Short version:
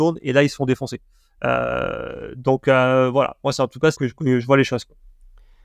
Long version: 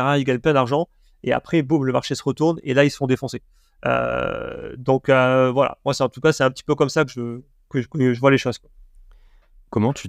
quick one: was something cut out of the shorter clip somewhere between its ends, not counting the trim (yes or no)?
yes